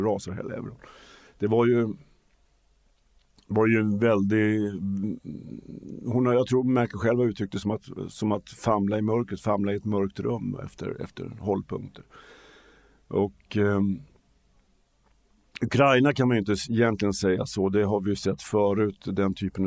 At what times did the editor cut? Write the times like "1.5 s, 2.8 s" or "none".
none